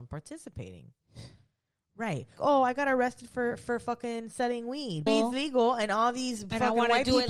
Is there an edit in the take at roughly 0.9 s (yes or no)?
no